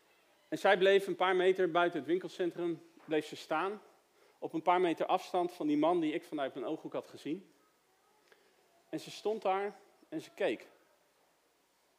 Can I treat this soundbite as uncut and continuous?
yes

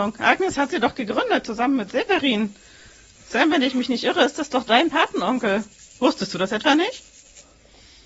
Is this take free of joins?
yes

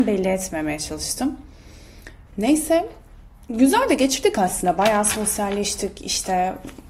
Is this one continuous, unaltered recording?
no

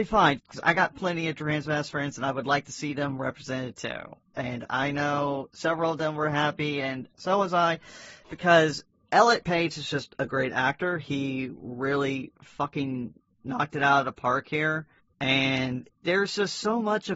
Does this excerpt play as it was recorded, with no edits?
yes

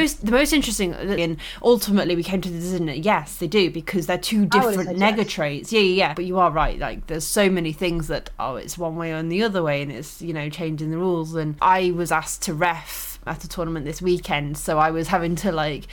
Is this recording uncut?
no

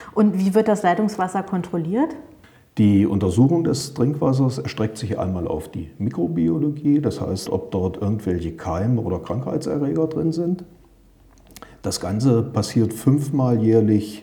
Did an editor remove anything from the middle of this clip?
yes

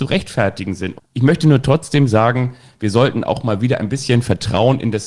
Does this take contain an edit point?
yes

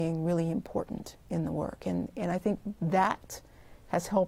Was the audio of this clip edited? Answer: no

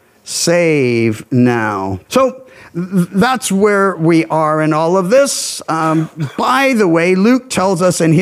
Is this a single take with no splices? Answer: no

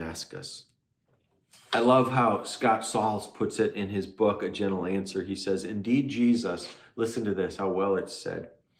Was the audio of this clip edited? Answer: no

